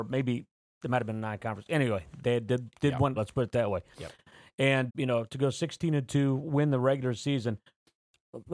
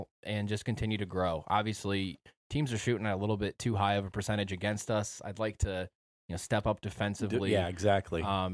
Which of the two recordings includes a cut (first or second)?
first